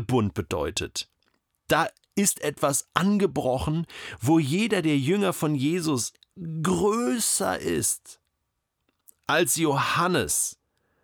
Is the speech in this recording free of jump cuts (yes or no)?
yes